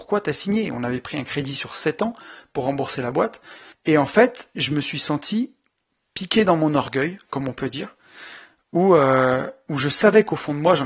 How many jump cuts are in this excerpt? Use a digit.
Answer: 1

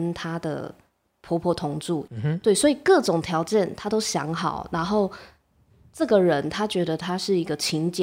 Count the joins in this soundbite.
0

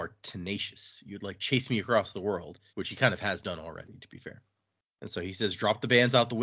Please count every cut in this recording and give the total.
1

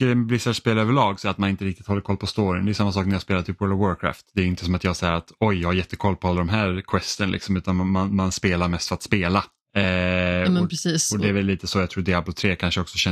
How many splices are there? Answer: 0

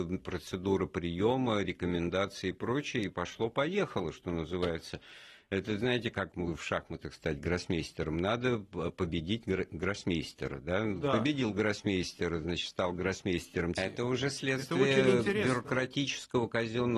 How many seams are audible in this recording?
2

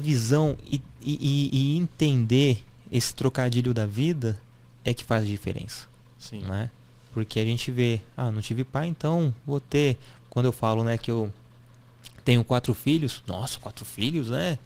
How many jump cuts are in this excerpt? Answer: 1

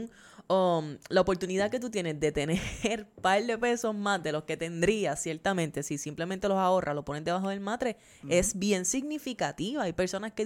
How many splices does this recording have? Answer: 0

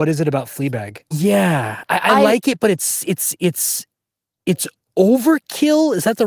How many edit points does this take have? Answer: 1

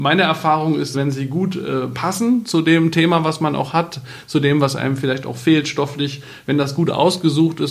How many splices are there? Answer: 1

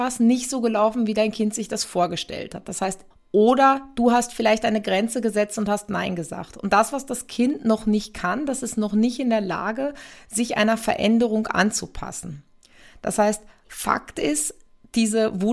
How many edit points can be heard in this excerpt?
1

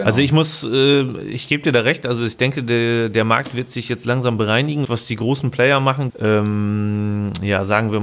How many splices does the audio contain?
2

